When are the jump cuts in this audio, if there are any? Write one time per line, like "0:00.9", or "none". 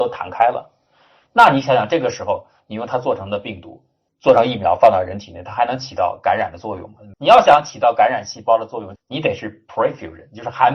0:07.1
0:09.0